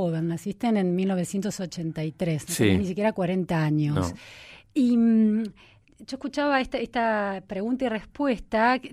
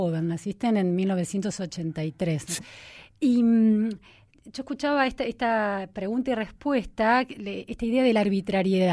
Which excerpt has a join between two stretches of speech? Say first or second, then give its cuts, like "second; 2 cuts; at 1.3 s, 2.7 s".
second; 1 cut; at 2.6 s